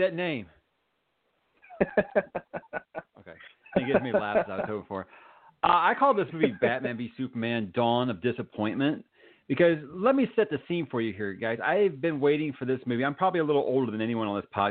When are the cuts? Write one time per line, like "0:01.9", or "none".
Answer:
none